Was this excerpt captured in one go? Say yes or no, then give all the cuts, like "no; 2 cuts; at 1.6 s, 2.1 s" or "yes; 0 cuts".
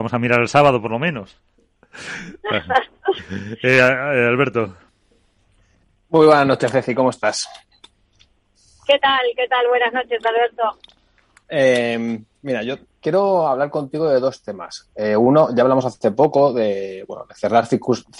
yes; 0 cuts